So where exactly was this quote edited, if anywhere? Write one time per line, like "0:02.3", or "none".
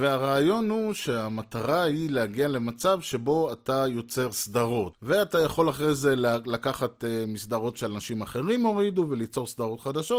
0:04.9